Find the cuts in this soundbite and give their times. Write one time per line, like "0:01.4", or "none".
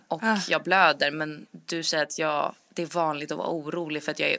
none